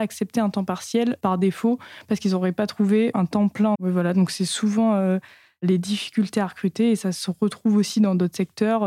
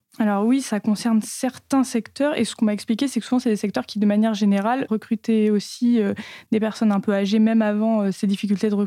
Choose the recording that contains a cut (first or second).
first